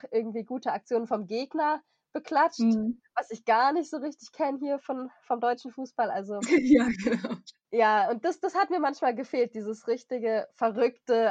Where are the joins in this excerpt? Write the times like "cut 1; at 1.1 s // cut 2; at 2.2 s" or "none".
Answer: none

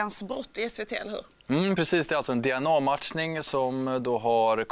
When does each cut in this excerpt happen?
none

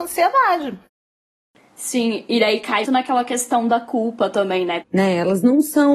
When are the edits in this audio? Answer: cut 1; at 2.8 s // cut 2; at 4.8 s

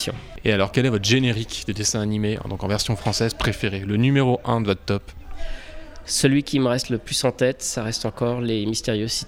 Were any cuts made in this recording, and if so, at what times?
none

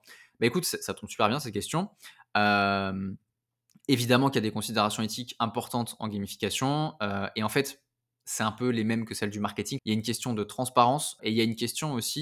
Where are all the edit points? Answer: cut 1; at 9.8 s // cut 2; at 11.2 s

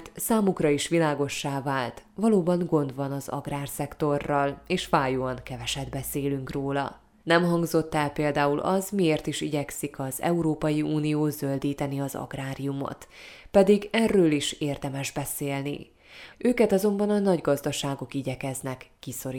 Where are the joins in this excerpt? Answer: cut 1; at 7.2 s // cut 2; at 16.3 s

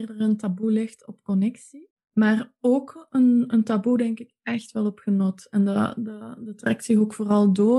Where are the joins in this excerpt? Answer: none

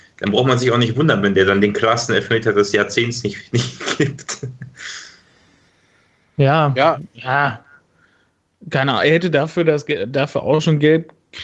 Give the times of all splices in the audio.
none

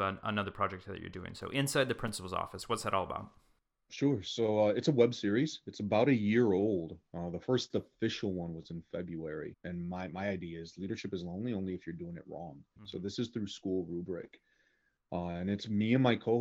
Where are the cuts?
cut 1; at 9.5 s // cut 2; at 12.8 s

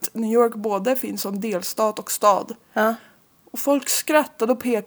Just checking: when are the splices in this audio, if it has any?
none

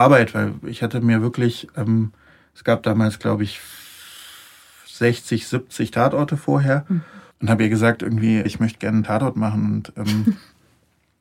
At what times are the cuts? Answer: cut 1; at 7.3 s // cut 2; at 8.5 s

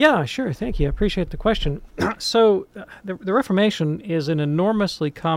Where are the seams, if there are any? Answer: none

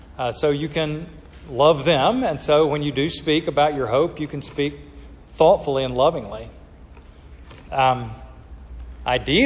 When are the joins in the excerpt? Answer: cut 1; at 7.7 s

